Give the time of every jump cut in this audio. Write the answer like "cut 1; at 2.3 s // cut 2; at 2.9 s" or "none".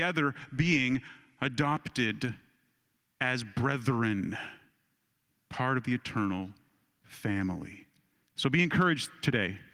cut 1; at 5.3 s

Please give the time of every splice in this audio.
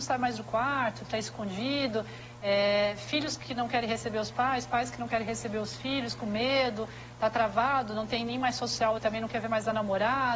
cut 1; at 1.0 s // cut 2; at 6.2 s // cut 3; at 9.0 s

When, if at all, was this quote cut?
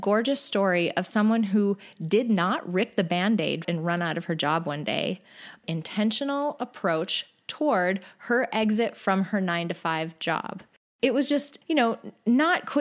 cut 1; at 3.6 s // cut 2; at 5.6 s // cut 3; at 11.6 s

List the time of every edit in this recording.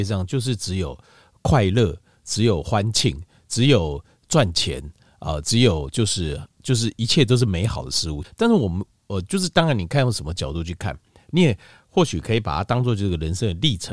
cut 1; at 8.2 s

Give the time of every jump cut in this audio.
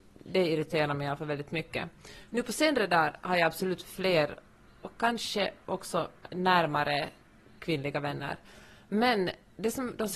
none

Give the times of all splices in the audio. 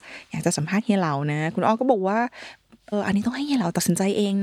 cut 1; at 2.9 s

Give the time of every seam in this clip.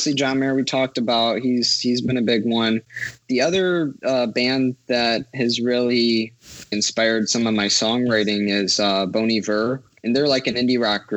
cut 1; at 6.7 s

